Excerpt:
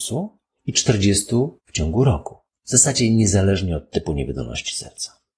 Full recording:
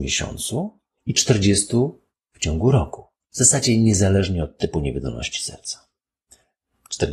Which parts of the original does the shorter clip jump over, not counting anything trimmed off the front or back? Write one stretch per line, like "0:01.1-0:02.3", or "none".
0:02.0-0:02.2